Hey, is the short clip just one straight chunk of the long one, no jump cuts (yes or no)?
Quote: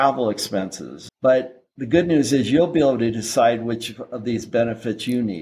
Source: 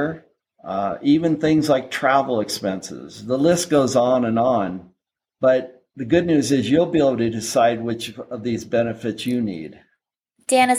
no